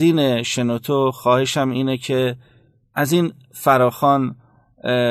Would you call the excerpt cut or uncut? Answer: uncut